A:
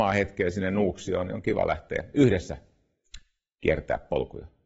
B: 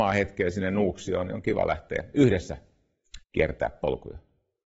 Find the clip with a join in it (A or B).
B